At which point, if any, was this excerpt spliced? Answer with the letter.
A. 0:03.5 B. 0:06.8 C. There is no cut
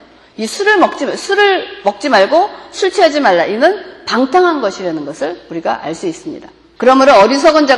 B